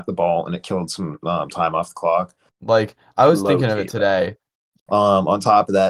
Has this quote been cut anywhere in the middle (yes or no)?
yes